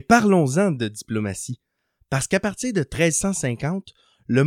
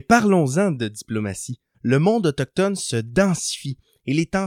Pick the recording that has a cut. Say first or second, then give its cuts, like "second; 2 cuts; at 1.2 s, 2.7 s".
second; 1 cut; at 1.7 s